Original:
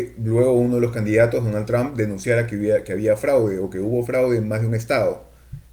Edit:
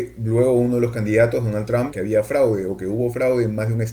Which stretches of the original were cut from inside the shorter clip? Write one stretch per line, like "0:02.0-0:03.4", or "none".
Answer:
0:01.9-0:02.8